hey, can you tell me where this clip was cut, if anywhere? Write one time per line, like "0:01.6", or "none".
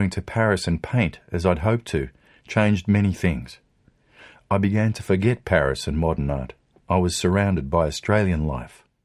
0:06.7